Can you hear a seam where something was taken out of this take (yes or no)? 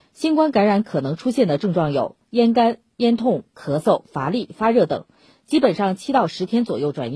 no